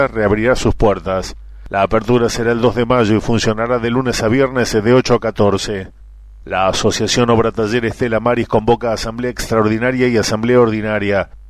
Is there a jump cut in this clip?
no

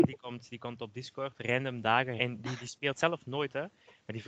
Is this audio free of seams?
no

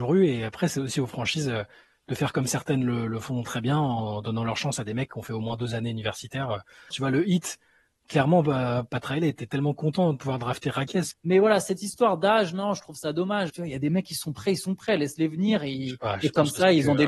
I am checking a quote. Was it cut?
yes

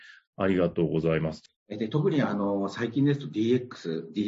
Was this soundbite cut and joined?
yes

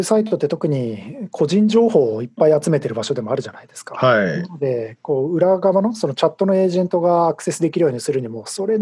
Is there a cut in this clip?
no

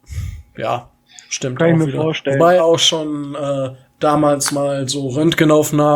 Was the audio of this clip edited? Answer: yes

